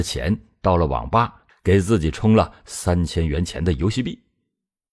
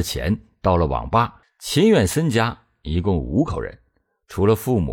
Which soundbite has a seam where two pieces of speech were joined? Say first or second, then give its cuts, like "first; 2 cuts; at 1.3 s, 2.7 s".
second; 1 cut; at 1.4 s